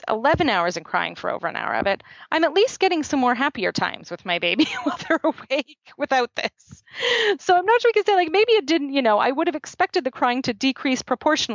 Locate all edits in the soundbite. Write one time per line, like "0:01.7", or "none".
none